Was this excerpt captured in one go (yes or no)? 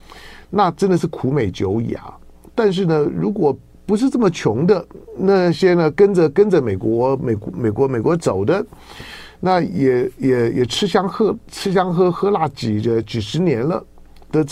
yes